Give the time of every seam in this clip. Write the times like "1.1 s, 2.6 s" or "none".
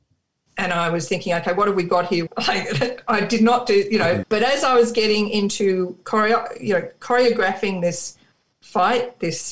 2.3 s, 4.2 s